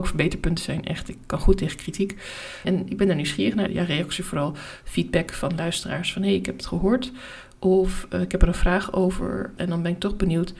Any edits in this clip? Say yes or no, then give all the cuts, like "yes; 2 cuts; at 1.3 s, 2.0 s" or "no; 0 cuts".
yes; 3 cuts; at 2.6 s, 3.7 s, 9.6 s